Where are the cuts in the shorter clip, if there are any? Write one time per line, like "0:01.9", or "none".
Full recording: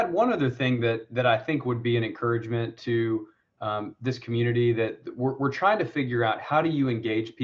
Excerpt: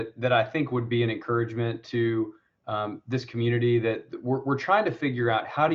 none